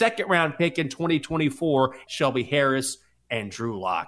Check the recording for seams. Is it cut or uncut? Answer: cut